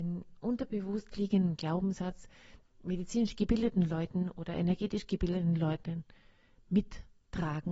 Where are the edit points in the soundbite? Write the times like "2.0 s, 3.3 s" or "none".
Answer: 2.7 s